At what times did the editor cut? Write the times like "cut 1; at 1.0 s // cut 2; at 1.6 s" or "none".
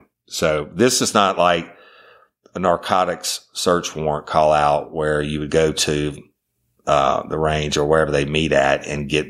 none